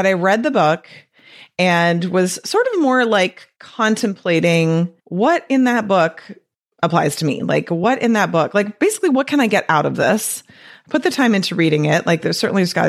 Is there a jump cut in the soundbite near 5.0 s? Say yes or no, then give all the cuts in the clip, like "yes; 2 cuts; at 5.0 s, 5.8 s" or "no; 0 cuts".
yes; 1 cut; at 5.0 s